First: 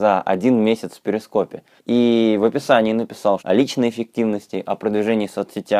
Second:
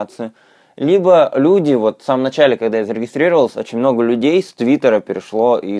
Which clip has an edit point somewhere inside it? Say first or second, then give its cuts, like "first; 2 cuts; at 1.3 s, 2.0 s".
first; 2 cuts; at 1.8 s, 3.4 s